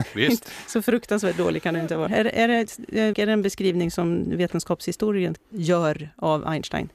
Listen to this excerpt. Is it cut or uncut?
cut